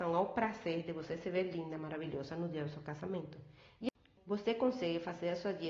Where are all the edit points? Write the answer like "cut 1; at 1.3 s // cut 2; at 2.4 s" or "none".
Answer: cut 1; at 4.2 s